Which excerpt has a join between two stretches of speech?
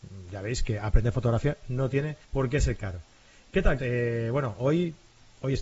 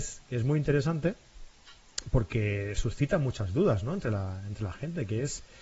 first; 2 cuts; at 2.2 s, 3.8 s

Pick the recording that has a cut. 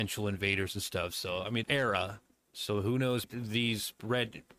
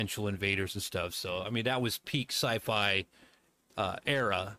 first; 2 cuts; at 1.6 s, 3.2 s

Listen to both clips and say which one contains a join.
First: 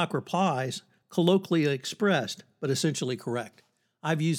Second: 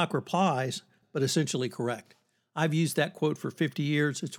second; 1 cut; at 1.0 s

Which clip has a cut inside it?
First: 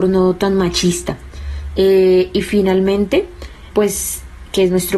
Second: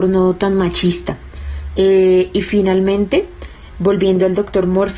first; 1 cut; at 3.7 s

